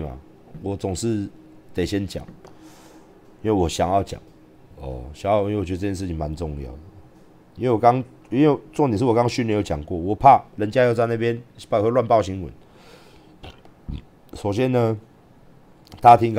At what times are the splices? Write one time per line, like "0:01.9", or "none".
none